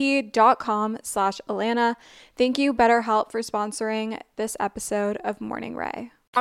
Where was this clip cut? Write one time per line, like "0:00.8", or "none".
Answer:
none